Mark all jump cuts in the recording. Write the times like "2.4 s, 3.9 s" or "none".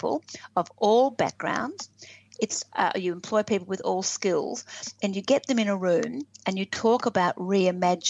none